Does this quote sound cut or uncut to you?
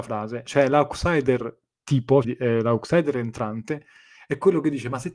cut